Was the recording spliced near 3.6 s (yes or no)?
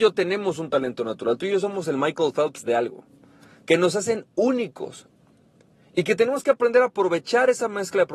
yes